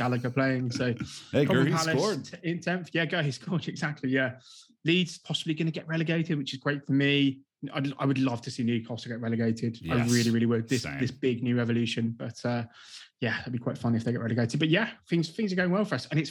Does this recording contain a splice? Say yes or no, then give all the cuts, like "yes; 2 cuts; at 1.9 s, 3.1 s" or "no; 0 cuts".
no; 0 cuts